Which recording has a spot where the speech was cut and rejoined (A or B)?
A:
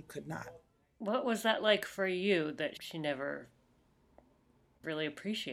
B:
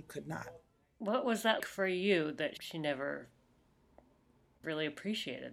B